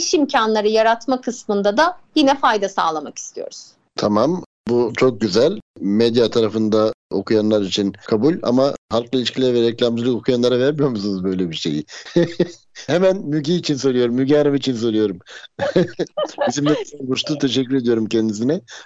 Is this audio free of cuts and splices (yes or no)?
no